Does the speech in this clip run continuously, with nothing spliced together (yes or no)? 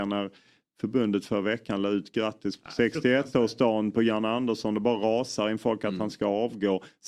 yes